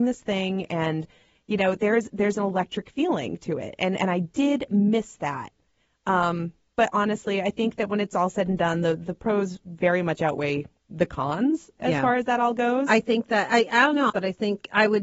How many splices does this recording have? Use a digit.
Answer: 1